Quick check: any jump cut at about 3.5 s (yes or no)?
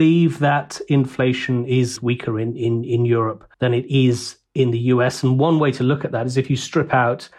yes